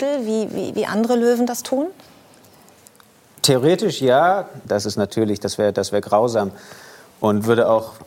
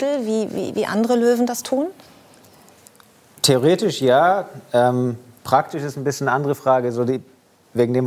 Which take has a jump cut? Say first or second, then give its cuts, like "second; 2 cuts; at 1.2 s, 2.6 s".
first; 1 cut; at 4.6 s